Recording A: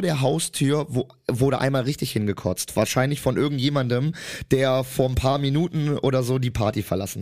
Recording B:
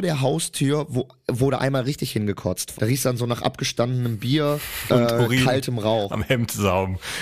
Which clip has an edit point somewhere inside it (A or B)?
B